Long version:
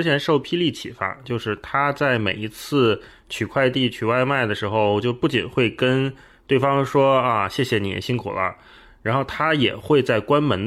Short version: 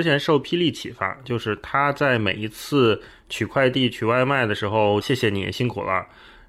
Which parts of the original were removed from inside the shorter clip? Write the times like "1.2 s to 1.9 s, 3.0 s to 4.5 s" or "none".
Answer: 5.0 s to 7.5 s